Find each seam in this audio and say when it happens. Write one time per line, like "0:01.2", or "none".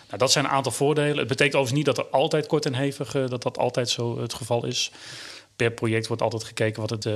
none